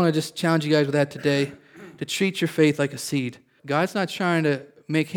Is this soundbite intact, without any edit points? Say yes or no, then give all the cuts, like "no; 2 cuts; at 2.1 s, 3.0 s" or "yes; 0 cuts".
no; 1 cut; at 3.6 s